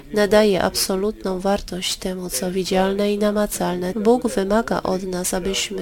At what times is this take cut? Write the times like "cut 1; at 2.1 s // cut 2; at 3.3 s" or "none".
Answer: cut 1; at 3.9 s